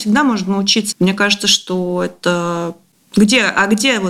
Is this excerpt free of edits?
no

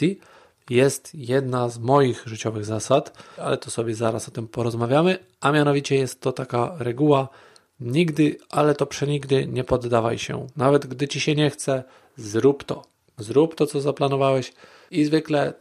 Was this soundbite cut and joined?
yes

